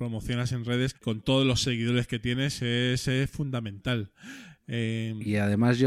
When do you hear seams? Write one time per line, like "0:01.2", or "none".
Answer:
0:00.9

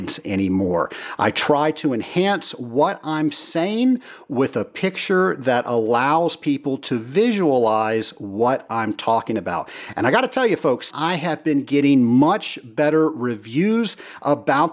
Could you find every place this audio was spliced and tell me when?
0:10.9

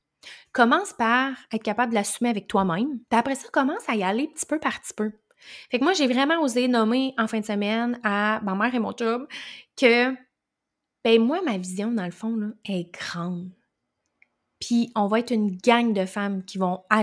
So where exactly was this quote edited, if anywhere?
0:03.0

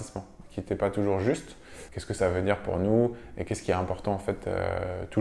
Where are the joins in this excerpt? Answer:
0:01.9

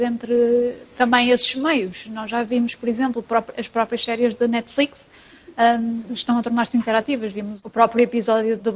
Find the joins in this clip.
none

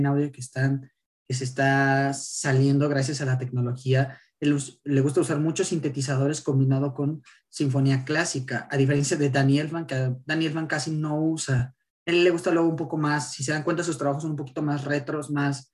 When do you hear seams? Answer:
none

